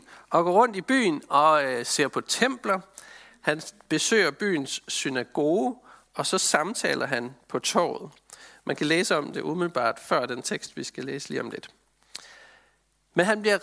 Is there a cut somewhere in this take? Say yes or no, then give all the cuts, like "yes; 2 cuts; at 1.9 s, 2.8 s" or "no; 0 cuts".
yes; 1 cut; at 3.3 s